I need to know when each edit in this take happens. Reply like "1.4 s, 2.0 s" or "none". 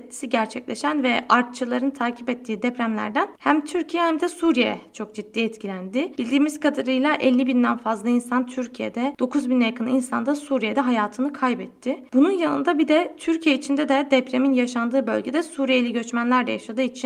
none